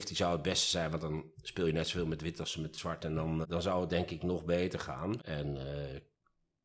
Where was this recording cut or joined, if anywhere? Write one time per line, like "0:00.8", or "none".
0:03.4
0:05.2